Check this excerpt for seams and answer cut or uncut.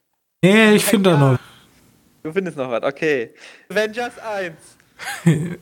cut